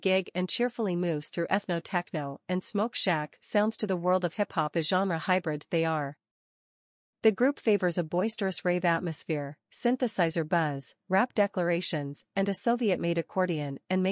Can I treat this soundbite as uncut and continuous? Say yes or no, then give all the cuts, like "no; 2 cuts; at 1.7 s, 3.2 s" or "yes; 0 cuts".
no; 1 cut; at 4.7 s